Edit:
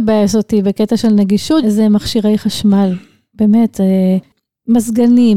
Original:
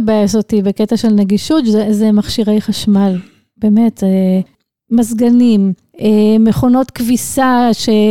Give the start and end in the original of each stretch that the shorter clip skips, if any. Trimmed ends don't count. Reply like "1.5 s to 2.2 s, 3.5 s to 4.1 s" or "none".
1.6 s to 1.8 s